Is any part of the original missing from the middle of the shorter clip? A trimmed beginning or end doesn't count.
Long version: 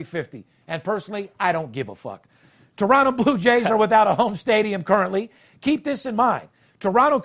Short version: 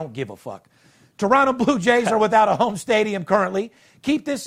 no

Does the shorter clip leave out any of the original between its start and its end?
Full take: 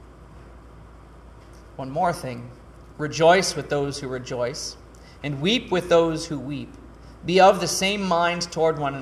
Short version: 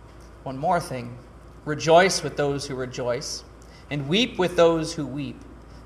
no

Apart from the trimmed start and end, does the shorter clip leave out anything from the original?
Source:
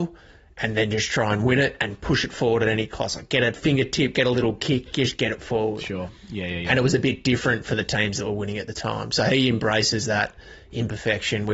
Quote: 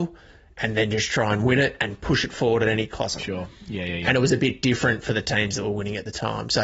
yes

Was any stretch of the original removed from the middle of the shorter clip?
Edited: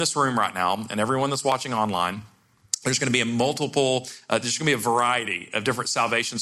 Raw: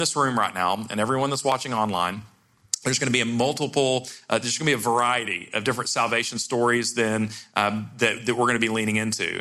no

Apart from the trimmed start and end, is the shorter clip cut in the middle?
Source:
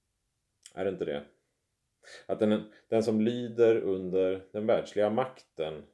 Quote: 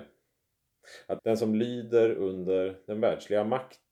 yes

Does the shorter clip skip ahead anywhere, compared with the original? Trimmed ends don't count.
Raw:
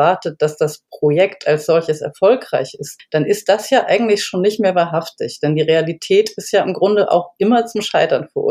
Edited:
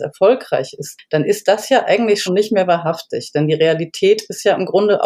yes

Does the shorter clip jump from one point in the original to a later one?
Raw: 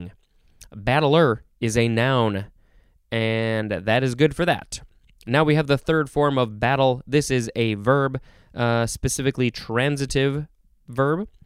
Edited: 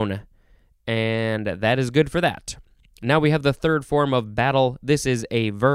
no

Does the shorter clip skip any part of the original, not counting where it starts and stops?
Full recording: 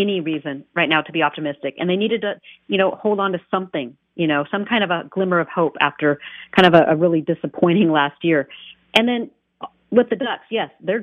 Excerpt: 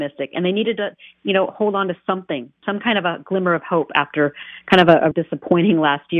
yes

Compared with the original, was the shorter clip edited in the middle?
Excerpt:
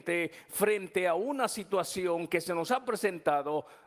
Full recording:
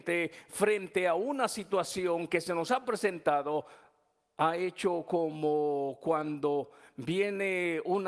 no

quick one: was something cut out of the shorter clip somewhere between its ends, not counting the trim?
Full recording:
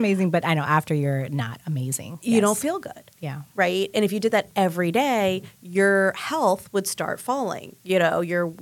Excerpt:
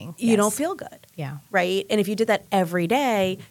no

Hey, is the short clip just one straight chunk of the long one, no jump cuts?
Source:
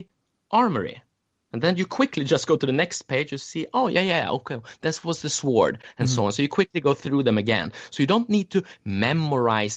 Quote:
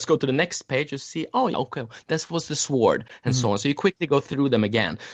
no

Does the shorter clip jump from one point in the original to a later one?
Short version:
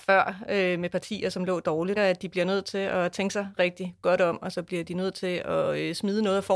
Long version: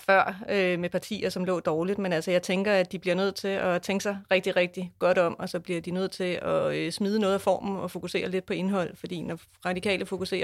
yes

